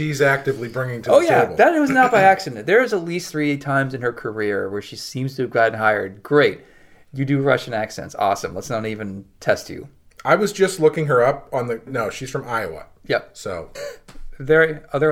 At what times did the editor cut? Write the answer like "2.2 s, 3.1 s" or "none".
11.9 s, 13.7 s